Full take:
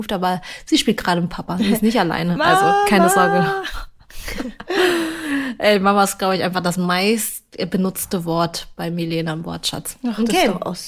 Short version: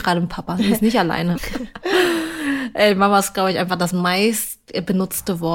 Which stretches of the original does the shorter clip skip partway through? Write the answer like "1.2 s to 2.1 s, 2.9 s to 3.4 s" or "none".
2.4 s to 4.2 s

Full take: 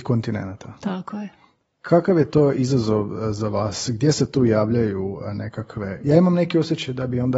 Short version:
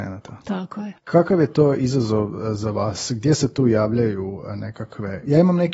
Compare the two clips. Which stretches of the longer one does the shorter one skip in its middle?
1.3 s to 1.7 s

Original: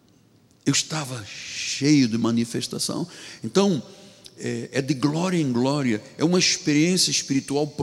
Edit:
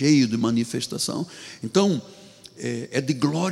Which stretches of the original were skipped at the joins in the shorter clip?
none

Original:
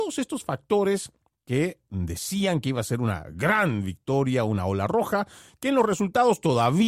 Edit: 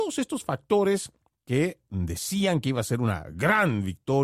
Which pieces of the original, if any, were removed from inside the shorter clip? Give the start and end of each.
none

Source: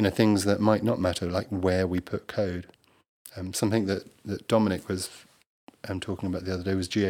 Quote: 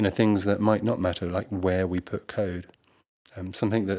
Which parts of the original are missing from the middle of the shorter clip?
none

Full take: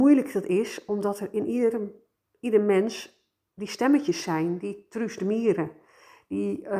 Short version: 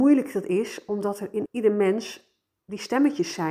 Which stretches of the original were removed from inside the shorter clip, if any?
1.5 s to 2.3 s

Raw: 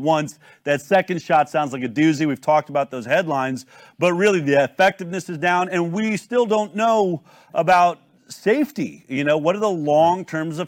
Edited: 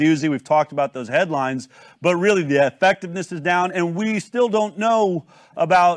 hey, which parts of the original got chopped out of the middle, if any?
none

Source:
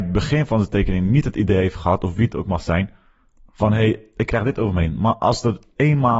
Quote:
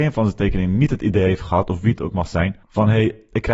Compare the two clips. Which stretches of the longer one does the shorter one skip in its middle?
3.0 s to 3.5 s

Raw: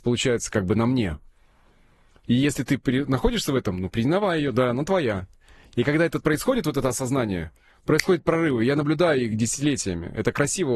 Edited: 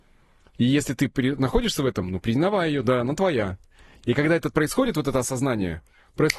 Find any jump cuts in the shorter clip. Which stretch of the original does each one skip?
none

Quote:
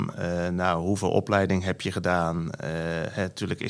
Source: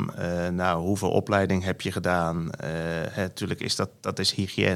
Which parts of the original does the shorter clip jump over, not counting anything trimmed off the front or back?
none

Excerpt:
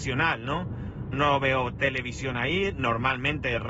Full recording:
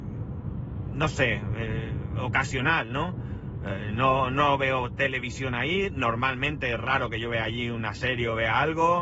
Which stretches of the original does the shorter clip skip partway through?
3.6 s to 4.3 s

